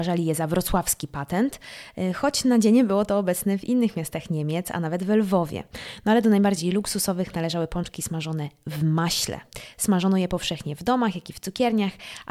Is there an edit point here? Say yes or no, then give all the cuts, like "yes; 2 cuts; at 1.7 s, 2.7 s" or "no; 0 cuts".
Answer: no; 0 cuts